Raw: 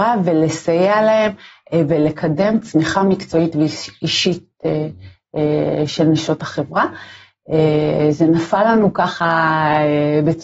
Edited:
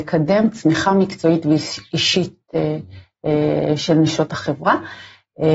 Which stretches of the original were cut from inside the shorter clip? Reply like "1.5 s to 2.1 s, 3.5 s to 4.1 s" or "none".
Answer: none

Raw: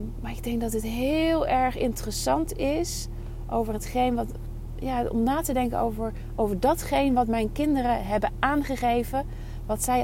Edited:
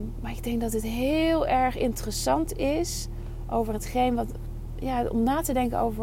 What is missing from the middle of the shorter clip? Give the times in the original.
none

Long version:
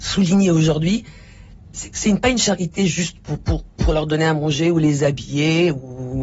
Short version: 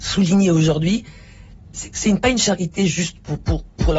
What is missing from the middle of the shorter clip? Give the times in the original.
none

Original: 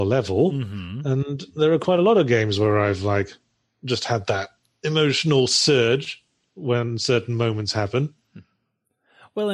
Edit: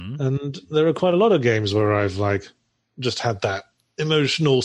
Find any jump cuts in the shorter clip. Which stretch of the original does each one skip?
none

